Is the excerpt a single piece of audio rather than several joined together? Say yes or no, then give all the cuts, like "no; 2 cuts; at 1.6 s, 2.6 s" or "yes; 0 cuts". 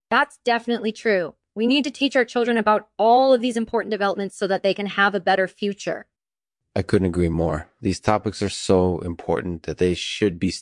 yes; 0 cuts